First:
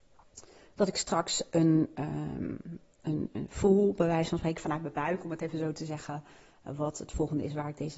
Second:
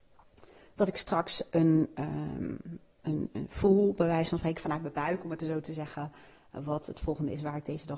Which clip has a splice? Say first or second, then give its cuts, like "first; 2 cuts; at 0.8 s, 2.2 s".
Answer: second; 1 cut; at 5.4 s